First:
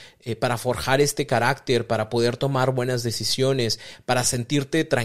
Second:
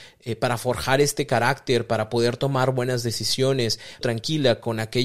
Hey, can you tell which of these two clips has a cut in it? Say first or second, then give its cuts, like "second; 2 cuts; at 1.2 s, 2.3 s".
second; 1 cut; at 4.0 s